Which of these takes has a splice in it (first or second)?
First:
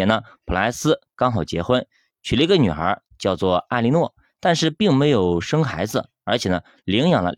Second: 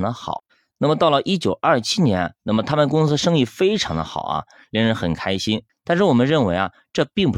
second